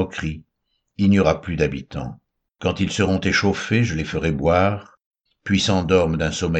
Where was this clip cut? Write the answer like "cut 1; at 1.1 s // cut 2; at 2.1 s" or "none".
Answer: cut 1; at 2.5 s // cut 2; at 5.3 s